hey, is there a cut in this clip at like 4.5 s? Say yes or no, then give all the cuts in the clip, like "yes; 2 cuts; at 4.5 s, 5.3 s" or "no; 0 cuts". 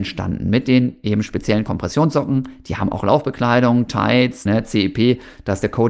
yes; 1 cut; at 4.5 s